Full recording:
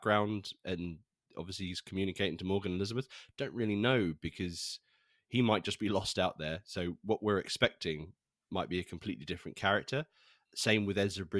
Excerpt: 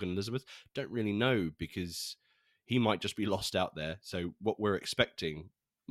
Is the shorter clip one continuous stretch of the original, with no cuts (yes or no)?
yes